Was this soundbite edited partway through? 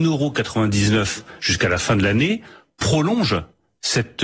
no; 0 cuts

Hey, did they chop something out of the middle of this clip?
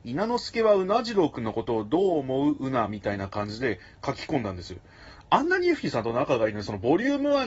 yes; 1 cut; at 5.2 s

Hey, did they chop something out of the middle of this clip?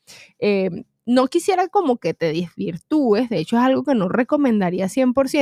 no; 0 cuts

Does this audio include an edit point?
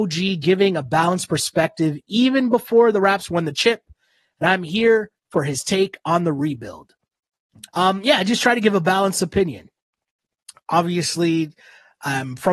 yes; 1 cut; at 7.7 s

